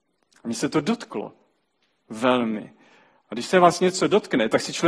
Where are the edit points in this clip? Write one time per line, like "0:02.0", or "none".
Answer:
none